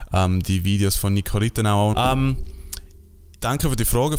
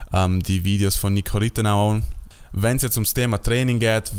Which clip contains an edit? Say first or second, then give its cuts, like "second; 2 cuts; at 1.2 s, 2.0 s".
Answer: first; 1 cut; at 1.9 s